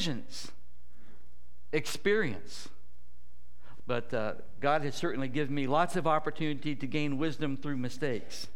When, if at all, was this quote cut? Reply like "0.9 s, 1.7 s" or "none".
3.8 s

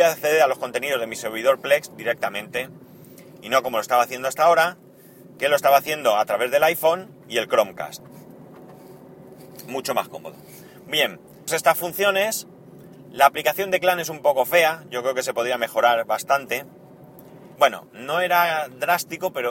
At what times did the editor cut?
11.5 s, 17.6 s

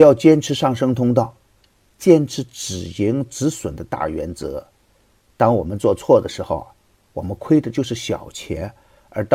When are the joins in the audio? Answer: none

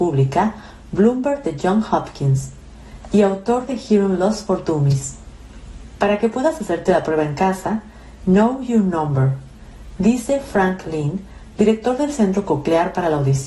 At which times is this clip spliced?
8.2 s, 10.0 s

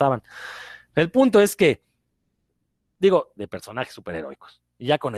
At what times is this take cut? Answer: 3.4 s

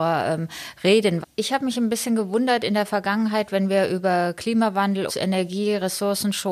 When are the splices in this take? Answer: 1.2 s, 5.1 s

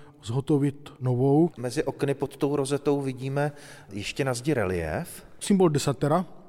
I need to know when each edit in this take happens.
none

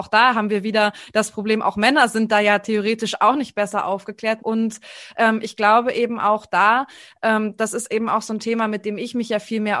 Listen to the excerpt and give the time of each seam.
4.4 s

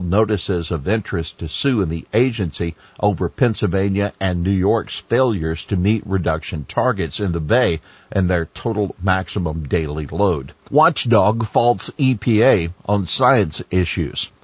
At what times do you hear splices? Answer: 10.7 s

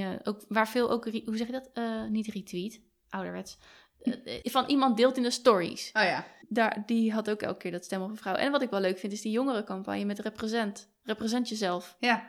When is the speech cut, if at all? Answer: 4.4 s, 6.4 s

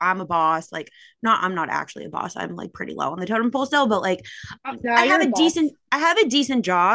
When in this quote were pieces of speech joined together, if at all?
4.8 s

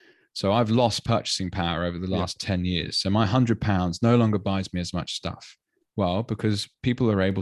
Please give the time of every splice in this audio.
5.9 s

